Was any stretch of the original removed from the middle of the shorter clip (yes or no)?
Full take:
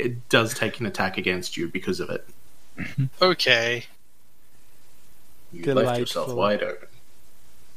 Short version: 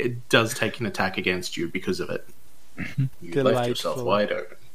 yes